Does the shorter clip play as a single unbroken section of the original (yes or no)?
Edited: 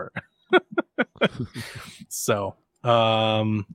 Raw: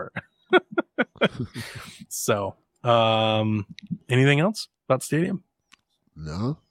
yes